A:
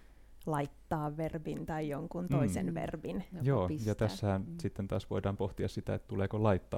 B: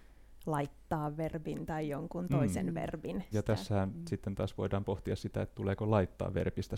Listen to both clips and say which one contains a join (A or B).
B